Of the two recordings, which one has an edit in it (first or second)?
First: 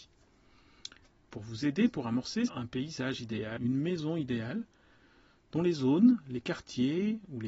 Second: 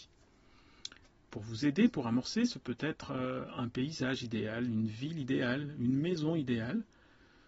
first